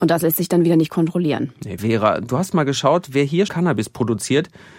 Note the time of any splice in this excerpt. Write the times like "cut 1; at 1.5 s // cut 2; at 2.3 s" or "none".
cut 1; at 1.8 s // cut 2; at 3.5 s